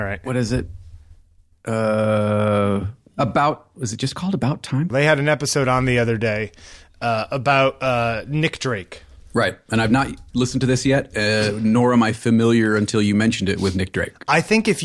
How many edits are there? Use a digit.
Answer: 1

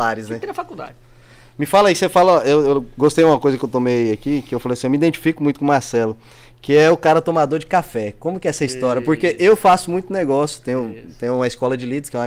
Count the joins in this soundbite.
0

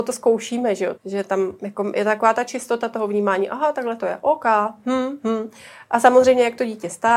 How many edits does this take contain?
1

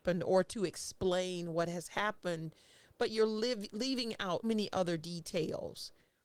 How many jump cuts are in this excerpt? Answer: 1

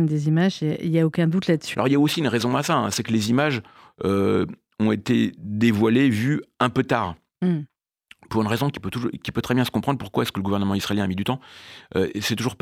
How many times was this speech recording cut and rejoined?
1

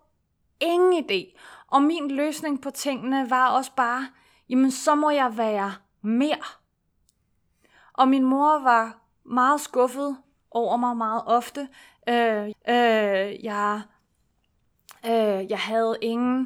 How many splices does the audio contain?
1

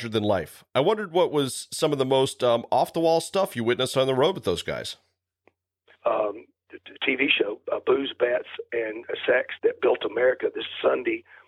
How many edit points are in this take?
2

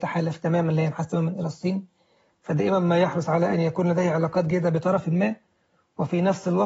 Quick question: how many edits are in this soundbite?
0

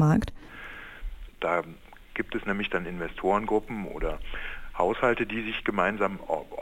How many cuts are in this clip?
1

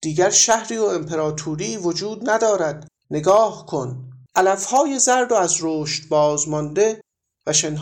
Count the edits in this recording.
2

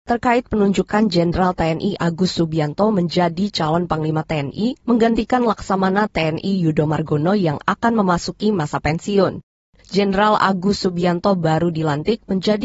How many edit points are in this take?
0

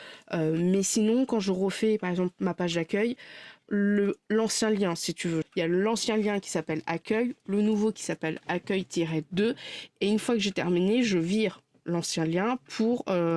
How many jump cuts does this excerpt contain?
2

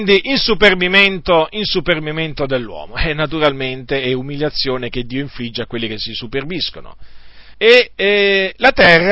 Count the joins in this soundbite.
1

